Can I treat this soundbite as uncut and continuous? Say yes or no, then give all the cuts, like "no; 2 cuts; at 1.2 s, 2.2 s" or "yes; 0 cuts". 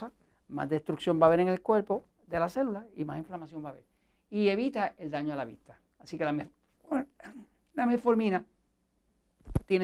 yes; 0 cuts